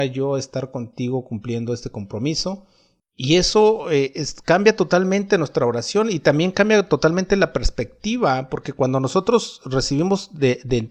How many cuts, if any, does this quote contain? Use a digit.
1